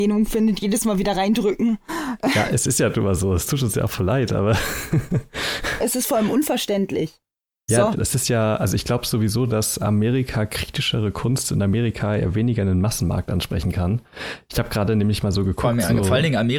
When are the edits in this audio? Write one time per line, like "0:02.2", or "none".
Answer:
0:07.9